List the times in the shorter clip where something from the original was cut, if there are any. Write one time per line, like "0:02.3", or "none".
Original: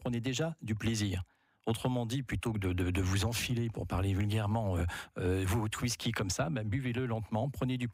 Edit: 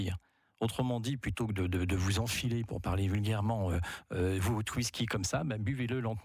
none